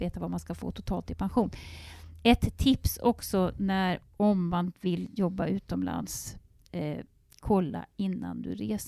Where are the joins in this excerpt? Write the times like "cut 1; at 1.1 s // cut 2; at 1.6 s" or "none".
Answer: none